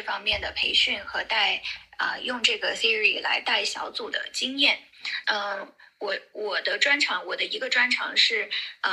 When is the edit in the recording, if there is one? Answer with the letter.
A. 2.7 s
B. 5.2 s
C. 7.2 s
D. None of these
B